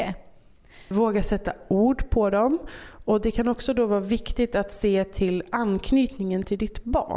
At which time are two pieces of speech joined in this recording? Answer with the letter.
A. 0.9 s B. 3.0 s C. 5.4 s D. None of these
A